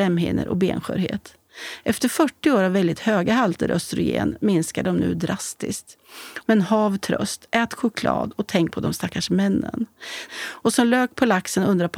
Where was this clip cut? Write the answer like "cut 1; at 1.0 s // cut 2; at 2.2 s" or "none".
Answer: cut 1; at 6.4 s // cut 2; at 10.3 s